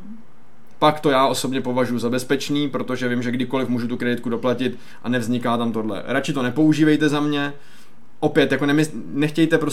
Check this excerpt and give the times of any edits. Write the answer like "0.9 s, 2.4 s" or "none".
none